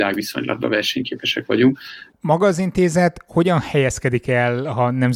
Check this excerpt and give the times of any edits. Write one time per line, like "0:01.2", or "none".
0:02.1